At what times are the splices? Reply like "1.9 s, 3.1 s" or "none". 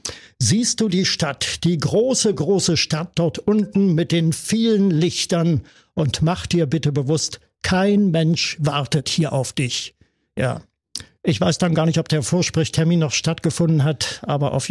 none